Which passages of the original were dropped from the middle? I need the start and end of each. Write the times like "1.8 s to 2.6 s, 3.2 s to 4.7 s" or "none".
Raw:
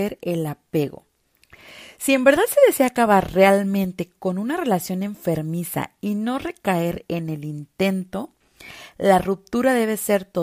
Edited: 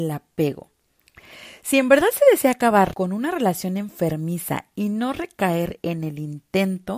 3.3 s to 4.2 s